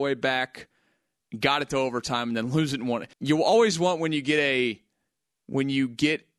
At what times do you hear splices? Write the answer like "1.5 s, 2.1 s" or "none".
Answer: 3.1 s